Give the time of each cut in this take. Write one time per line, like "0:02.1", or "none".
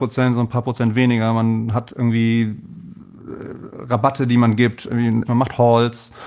0:05.3